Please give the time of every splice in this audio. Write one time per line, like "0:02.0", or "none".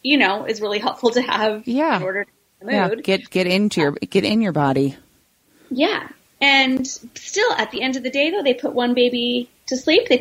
none